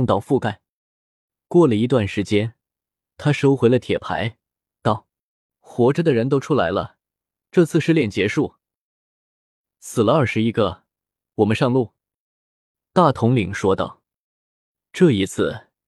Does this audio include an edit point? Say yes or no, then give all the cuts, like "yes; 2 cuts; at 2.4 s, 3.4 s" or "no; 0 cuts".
no; 0 cuts